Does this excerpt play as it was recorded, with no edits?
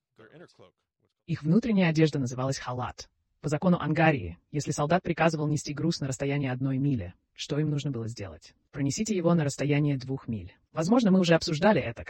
yes; 0 cuts

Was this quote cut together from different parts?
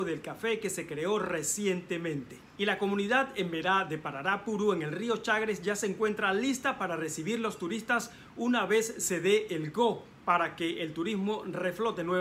yes; 1 cut; at 2.6 s

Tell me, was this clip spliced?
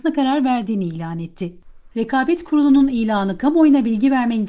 no; 0 cuts

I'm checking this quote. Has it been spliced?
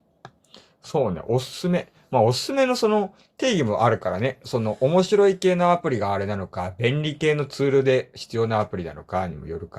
no; 0 cuts

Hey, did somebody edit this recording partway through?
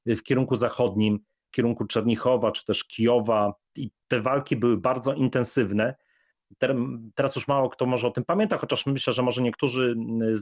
no; 0 cuts

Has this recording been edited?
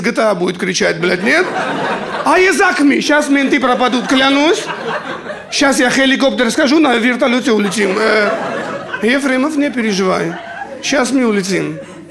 no; 0 cuts

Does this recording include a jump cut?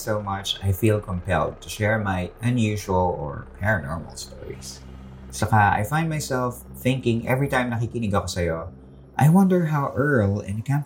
no; 0 cuts

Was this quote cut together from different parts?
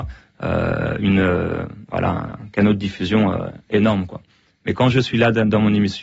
no; 0 cuts

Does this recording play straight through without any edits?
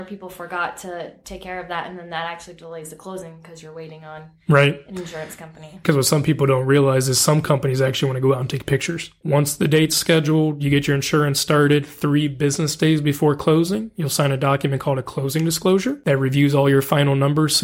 no; 1 cut; at 9.2 s

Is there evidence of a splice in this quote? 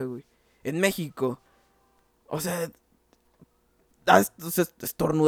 no; 0 cuts

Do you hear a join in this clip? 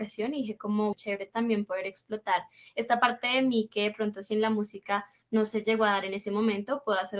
yes; 1 cut; at 0.9 s

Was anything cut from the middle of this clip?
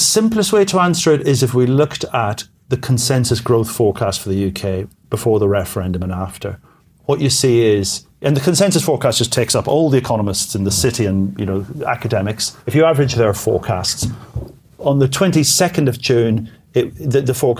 yes; 1 cut; at 12.6 s

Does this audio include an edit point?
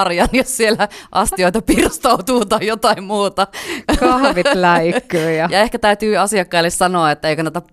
no; 0 cuts

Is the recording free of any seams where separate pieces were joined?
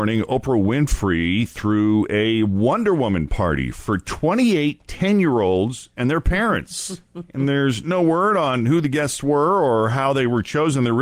yes; 0 cuts

